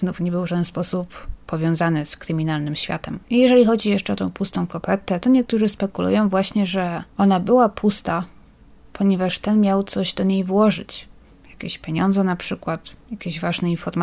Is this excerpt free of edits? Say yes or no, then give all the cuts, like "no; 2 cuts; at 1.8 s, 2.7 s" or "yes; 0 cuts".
no; 2 cuts; at 3.2 s, 7.1 s